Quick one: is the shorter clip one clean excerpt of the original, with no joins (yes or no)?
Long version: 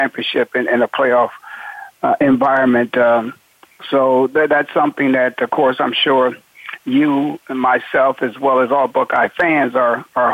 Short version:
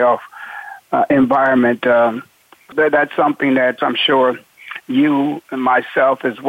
no